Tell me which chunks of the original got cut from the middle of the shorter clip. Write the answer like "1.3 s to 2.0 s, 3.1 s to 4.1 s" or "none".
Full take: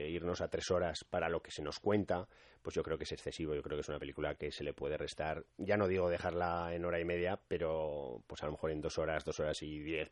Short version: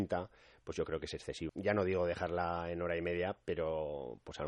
3.5 s to 5.5 s